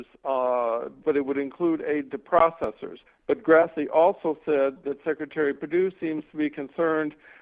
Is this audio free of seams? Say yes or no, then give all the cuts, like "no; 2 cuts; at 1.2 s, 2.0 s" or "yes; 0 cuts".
no; 2 cuts; at 1.0 s, 3.1 s